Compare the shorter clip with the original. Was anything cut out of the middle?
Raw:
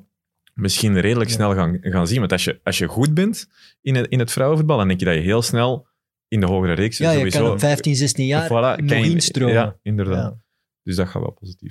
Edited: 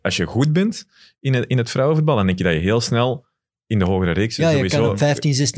no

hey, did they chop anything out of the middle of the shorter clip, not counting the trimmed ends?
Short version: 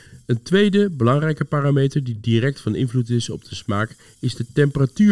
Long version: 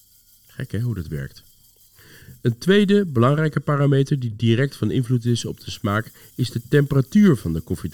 no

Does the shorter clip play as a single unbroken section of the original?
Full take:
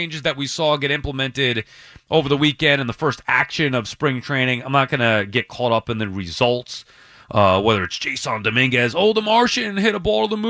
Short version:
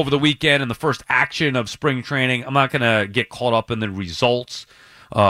yes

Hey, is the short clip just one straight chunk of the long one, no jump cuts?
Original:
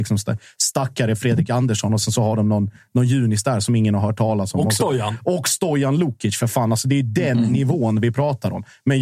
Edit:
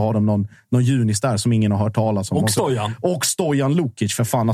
yes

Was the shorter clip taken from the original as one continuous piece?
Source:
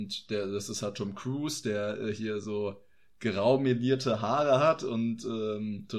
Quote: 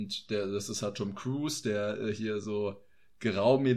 yes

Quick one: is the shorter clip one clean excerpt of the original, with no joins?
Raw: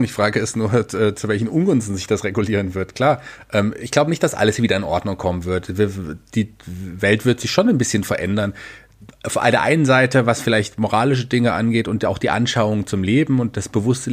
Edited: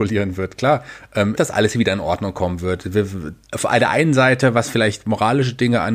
no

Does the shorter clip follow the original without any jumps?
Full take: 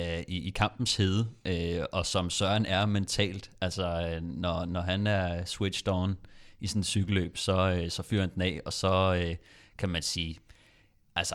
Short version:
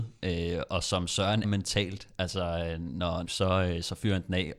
no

